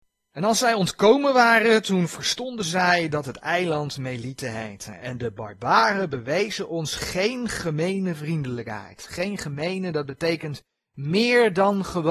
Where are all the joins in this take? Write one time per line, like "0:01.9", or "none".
none